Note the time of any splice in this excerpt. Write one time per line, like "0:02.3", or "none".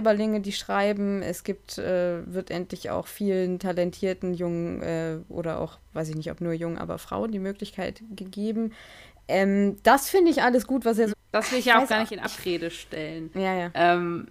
0:11.1
0:13.3